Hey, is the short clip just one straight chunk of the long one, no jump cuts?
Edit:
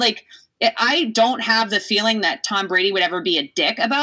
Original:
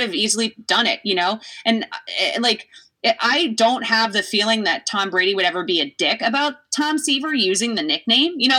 yes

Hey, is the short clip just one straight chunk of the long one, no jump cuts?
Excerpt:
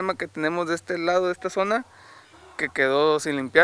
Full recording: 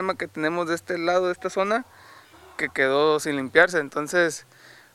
yes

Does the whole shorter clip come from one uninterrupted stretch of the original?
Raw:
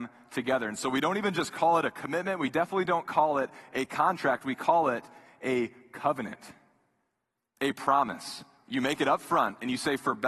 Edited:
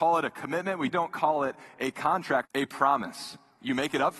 no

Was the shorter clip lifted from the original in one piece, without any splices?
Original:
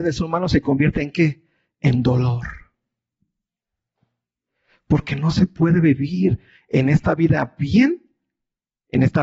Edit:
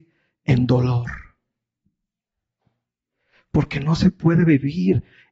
yes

